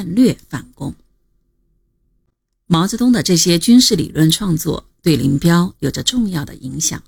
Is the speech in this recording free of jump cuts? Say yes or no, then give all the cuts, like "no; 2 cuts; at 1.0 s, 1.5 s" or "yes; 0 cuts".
yes; 0 cuts